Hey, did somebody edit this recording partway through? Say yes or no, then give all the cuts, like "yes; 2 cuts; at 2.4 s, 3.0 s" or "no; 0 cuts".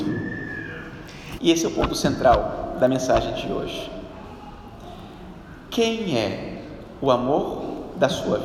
yes; 1 cut; at 1.4 s